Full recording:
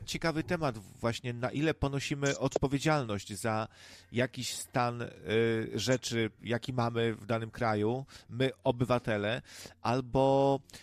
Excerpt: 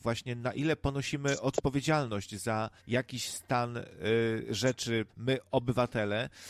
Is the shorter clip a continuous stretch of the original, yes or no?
no